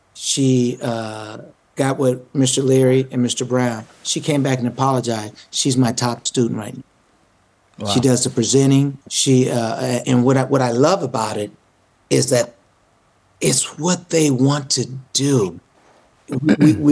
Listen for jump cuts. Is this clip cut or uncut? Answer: cut